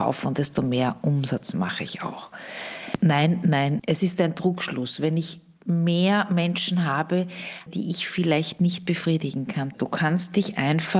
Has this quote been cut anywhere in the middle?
yes; 3 cuts; at 3.8 s, 7.7 s, 9.7 s

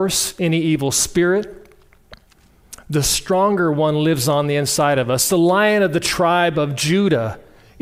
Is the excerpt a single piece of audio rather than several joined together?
yes; 0 cuts

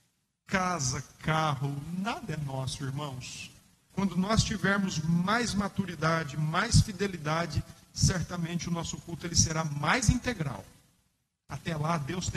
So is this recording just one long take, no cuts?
no; 1 cut; at 3.9 s

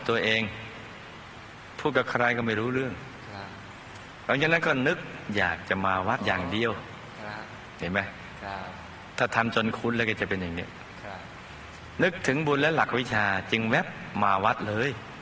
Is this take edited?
yes; 1 cut; at 6.2 s

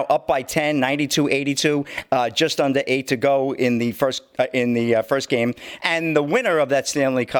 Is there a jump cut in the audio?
yes; 1 cut; at 5.8 s

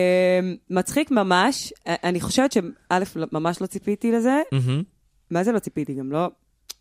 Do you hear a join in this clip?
no; 0 cuts

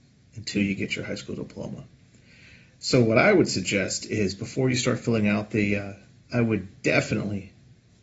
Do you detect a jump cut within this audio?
yes; 1 cut; at 6.2 s

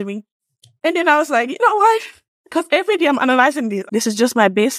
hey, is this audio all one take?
no; 1 cut; at 3.9 s

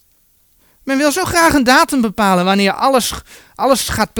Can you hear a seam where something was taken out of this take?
no; 0 cuts

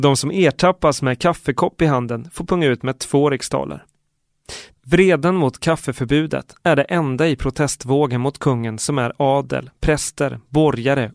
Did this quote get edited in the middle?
yes; 1 cut; at 4.7 s

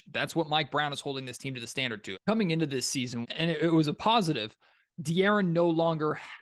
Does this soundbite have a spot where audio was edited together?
yes; 2 cuts; at 2.1 s, 3.2 s

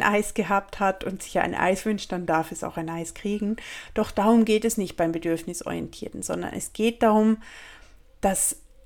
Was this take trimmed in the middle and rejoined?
no; 0 cuts

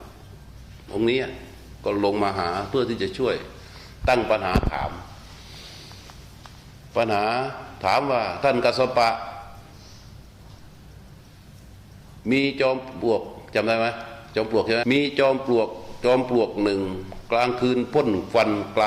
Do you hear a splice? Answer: yes; 1 cut; at 14.8 s

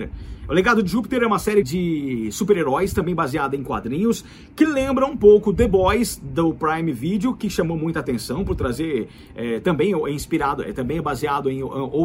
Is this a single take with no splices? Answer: no; 1 cut; at 1.6 s

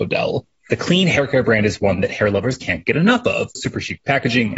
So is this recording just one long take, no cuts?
no; 1 cut; at 3.6 s

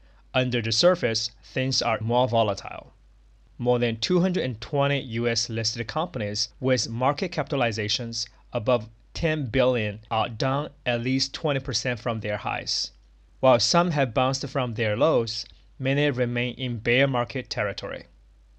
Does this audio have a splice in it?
yes; 2 cuts; at 2.0 s, 6.5 s

